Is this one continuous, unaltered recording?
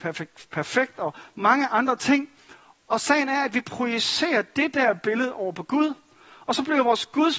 yes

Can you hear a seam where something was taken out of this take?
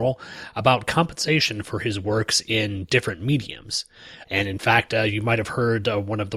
yes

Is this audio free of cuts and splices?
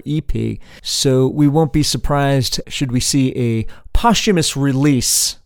no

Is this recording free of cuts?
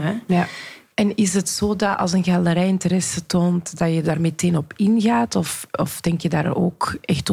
yes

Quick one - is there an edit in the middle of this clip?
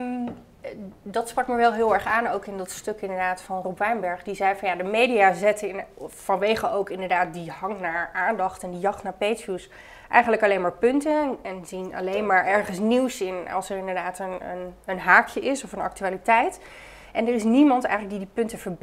no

